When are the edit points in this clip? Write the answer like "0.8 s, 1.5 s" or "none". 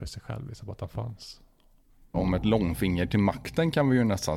2.1 s